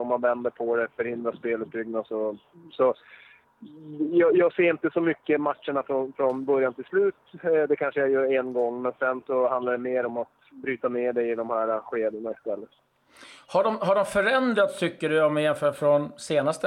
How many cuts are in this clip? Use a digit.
0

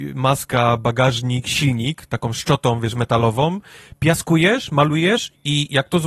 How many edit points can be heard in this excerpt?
0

